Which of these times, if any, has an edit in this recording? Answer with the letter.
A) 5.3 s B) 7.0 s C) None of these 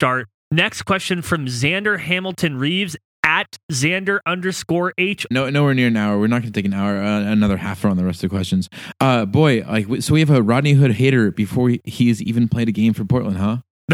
A